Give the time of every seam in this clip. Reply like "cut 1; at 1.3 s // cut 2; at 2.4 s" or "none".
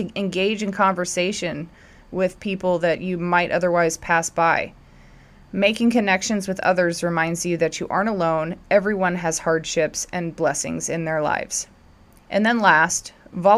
none